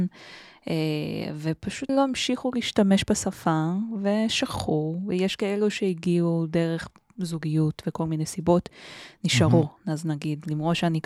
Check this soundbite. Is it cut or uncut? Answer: cut